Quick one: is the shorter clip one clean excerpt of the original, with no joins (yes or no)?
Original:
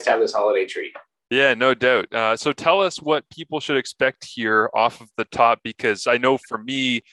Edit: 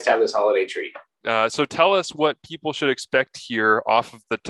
no